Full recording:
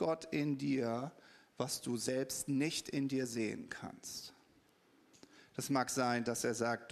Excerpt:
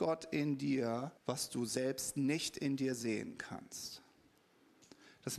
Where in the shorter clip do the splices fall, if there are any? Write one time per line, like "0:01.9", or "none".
0:01.2